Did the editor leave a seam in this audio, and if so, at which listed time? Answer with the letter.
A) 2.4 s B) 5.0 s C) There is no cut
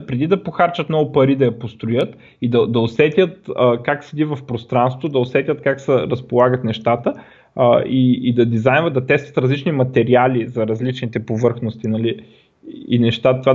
C